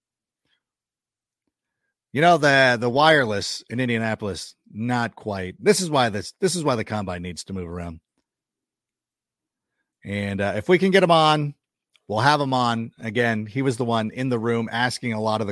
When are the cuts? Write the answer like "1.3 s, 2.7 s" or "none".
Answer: none